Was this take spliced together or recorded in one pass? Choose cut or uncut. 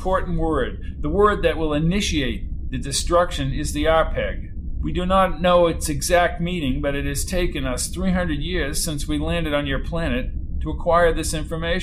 uncut